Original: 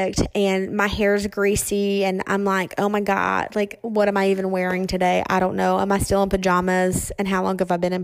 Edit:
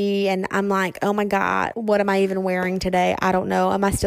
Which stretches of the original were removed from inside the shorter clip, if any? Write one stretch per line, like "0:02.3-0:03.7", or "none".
0:03.5-0:03.8